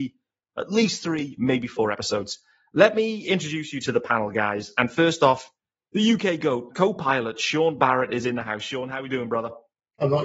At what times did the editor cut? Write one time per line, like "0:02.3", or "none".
0:06.7